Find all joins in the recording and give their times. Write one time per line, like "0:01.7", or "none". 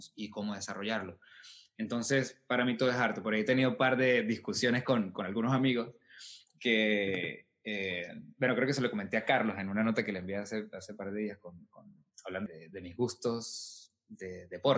0:12.5